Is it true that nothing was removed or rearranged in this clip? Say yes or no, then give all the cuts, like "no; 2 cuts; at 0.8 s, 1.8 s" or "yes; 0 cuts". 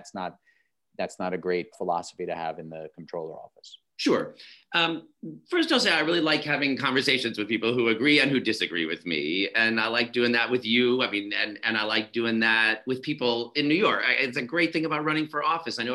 no; 1 cut; at 1.7 s